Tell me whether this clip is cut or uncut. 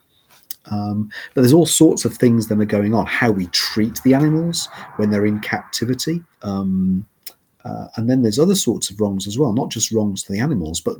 cut